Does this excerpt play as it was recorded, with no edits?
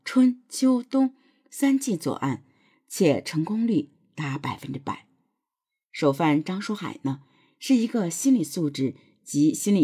yes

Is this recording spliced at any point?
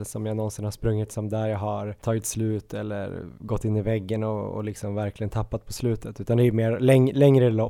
no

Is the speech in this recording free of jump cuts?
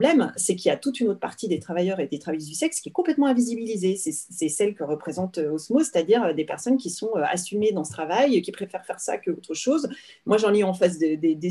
yes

